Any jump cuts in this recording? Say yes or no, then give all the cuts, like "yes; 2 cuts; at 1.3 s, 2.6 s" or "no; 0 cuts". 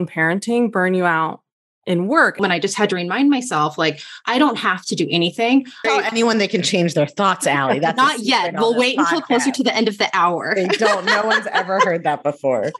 yes; 2 cuts; at 2.4 s, 5.8 s